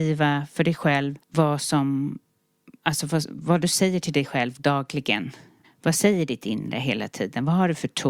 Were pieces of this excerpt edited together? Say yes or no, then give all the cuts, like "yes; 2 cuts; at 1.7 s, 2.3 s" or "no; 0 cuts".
yes; 2 cuts; at 1.2 s, 5.6 s